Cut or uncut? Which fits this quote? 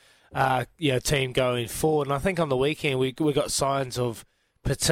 uncut